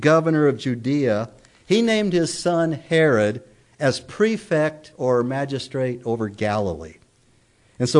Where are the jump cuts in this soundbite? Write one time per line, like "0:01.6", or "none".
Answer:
none